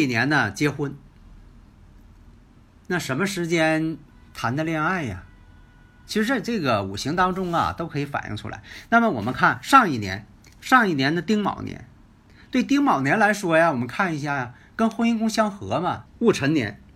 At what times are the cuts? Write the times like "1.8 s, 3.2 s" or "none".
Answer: 16.1 s